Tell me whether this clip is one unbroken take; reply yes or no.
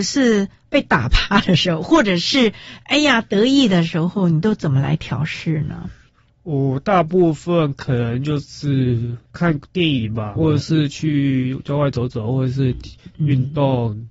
no